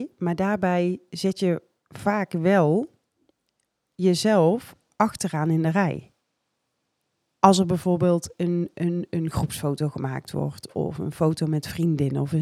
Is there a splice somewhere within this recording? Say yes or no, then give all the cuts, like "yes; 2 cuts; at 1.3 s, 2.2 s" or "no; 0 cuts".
no; 0 cuts